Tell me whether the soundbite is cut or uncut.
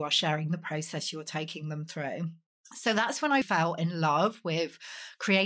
cut